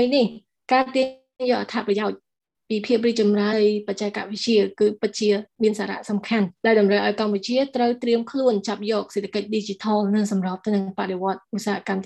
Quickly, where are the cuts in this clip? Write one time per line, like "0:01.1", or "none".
0:03.5
0:06.6